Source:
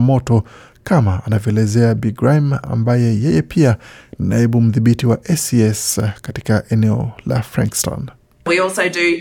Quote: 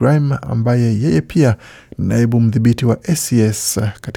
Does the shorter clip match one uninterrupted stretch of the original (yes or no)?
yes